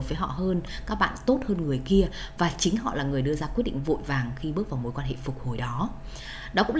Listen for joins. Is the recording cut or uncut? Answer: uncut